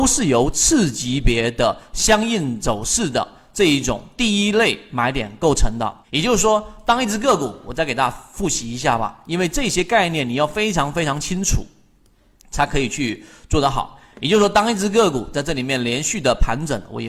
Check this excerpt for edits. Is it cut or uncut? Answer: uncut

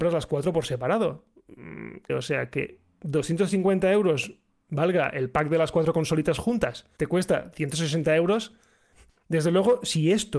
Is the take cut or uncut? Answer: cut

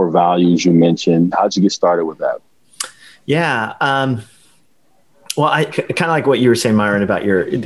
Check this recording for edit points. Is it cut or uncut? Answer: cut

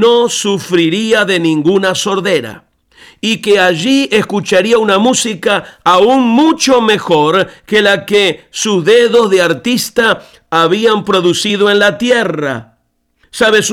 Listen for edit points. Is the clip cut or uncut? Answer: uncut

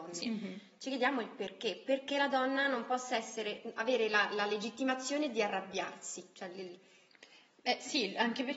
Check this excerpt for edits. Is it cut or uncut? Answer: uncut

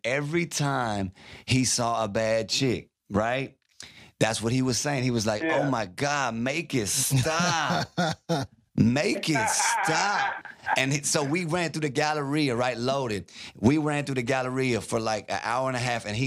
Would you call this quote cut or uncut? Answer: uncut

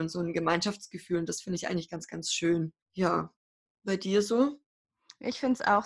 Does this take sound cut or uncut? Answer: cut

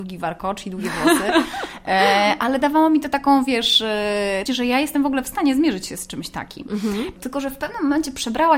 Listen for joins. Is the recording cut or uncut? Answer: cut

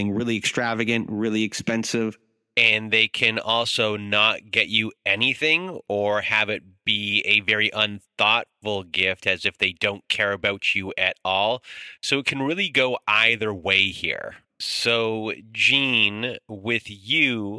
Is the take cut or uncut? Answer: cut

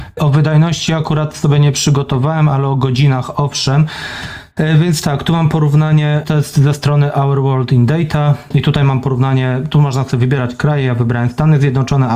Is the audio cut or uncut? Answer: uncut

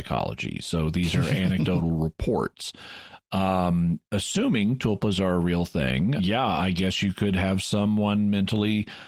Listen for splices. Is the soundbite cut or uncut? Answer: cut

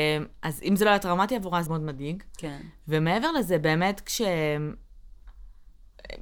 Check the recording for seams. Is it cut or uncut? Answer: cut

